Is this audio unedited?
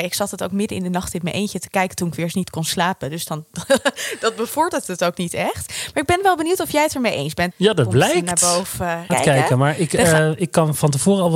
no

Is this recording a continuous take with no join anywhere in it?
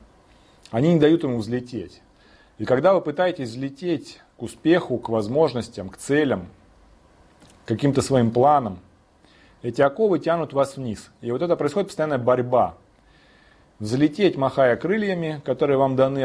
yes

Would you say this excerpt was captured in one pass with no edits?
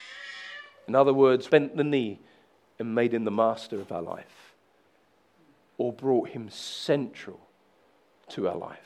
no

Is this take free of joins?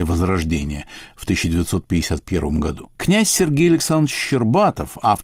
no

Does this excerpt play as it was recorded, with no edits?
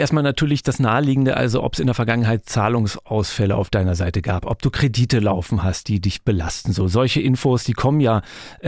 yes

